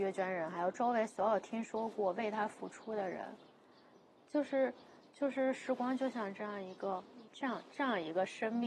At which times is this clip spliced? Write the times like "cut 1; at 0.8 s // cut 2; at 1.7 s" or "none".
cut 1; at 7.3 s